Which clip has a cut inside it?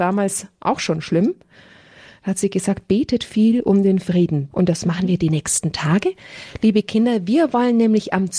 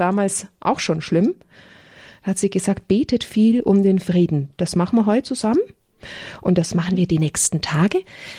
first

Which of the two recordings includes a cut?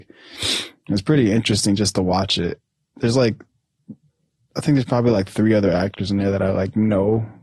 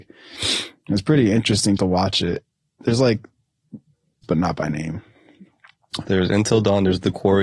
second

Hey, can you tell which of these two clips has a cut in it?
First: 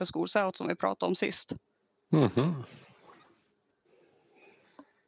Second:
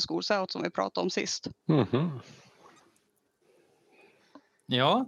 second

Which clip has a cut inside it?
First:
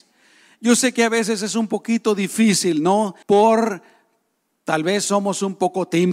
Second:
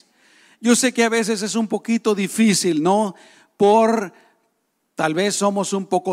first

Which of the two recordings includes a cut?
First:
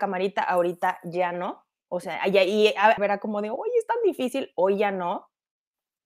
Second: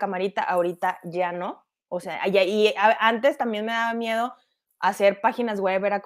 first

